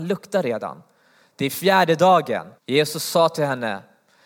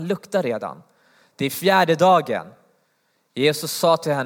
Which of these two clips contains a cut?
first; 1 cut; at 2.6 s

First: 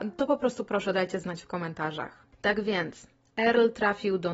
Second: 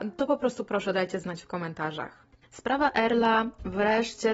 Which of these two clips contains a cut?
second; 1 cut; at 2.3 s

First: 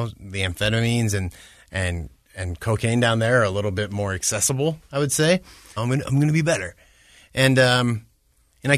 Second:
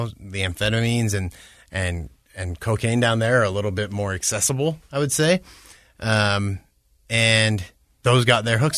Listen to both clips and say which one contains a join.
first; 1 cut; at 5.8 s

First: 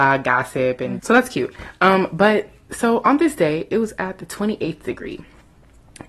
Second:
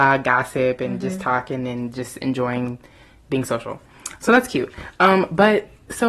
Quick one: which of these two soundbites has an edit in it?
first; 1 cut; at 1.0 s

